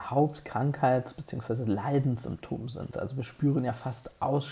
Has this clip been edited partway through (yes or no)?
no